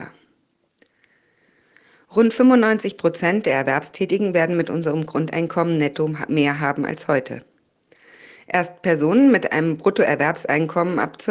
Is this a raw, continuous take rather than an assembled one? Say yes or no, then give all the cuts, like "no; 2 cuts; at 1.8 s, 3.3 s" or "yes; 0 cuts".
yes; 0 cuts